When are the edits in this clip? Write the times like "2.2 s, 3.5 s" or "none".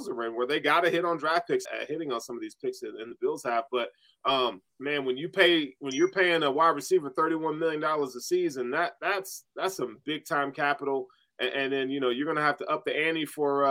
1.6 s, 4.7 s